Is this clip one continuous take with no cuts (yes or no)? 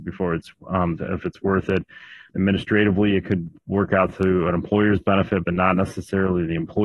no